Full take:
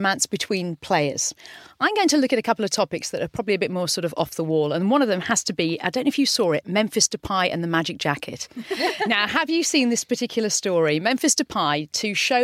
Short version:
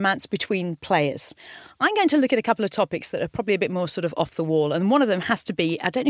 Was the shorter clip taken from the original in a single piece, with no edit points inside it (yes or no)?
yes